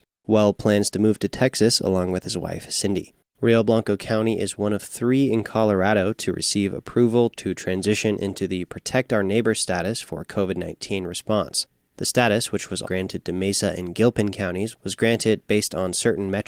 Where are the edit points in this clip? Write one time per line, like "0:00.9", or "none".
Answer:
0:03.2
0:12.8